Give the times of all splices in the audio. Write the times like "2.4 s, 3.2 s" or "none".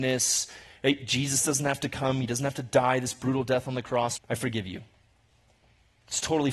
4.2 s